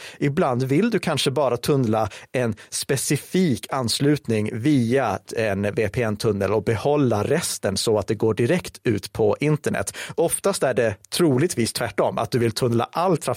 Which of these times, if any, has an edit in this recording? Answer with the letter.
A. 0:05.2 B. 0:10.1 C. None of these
A